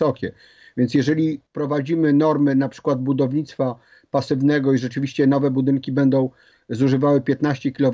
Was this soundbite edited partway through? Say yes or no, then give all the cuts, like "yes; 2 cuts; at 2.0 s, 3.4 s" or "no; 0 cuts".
yes; 1 cut; at 1.5 s